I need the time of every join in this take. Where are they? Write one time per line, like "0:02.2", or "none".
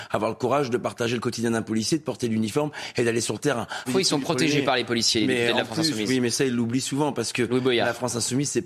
0:03.8